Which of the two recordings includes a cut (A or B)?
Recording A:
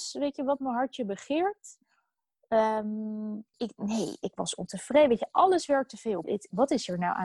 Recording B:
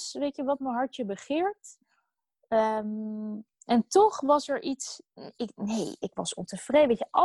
A